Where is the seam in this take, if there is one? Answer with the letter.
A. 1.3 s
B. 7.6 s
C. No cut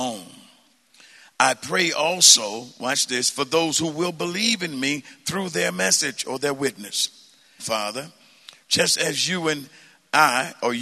B